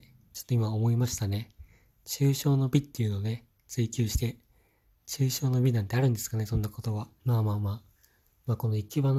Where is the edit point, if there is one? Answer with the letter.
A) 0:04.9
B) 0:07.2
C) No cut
B